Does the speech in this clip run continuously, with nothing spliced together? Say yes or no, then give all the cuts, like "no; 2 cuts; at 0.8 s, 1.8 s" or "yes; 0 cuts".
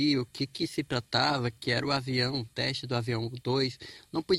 yes; 0 cuts